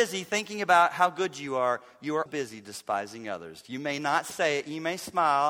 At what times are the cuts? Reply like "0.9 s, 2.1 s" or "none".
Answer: 2.3 s